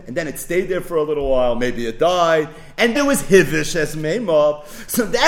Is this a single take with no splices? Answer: no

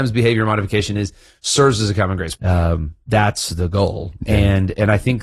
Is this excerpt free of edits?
no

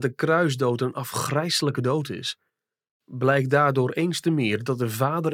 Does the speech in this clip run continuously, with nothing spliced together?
yes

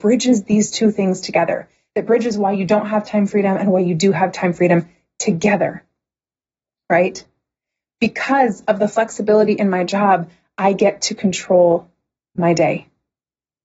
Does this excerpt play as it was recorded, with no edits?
yes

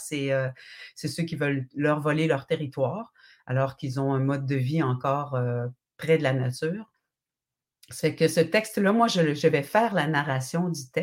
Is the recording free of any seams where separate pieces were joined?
yes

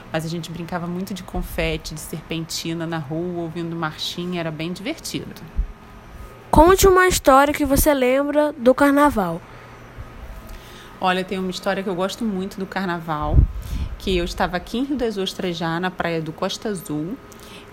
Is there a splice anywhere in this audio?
no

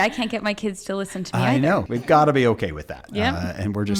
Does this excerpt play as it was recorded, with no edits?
no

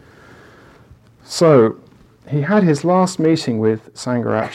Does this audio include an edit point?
no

